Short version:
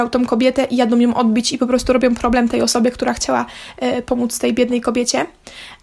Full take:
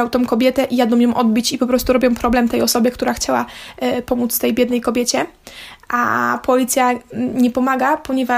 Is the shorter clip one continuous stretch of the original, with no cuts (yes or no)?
yes